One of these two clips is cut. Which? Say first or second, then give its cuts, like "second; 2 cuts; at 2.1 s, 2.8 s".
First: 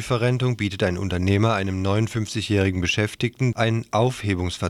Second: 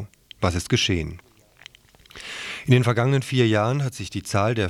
first; 1 cut; at 3.5 s